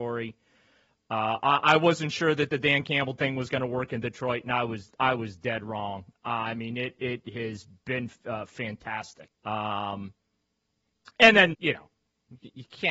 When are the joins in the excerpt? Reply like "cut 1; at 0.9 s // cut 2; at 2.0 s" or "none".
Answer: cut 1; at 9.3 s // cut 2; at 11.5 s